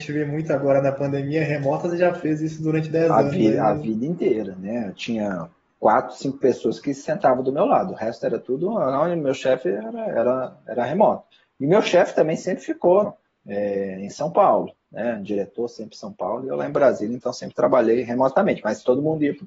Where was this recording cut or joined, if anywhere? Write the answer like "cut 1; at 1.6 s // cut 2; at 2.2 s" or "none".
cut 1; at 13.0 s